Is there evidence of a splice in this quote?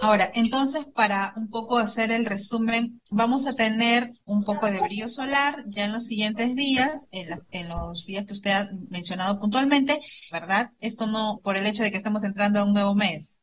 yes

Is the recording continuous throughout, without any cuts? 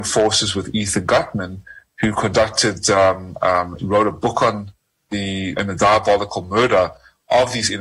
no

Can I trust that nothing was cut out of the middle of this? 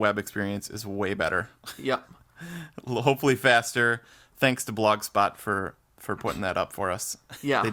yes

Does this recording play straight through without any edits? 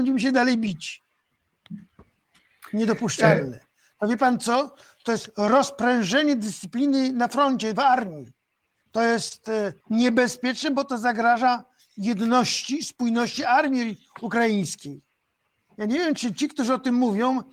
no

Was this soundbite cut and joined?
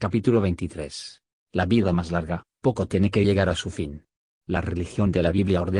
yes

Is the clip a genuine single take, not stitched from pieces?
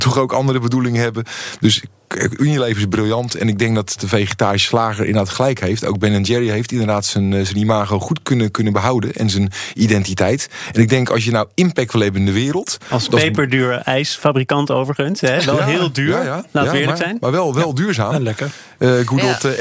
yes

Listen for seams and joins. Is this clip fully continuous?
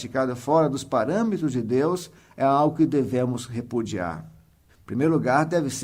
no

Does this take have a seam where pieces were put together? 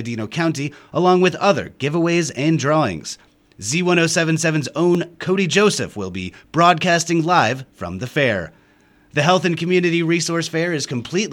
no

